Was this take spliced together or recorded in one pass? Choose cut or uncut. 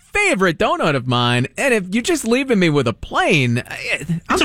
uncut